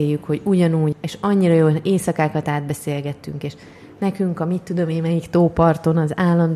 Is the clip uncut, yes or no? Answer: no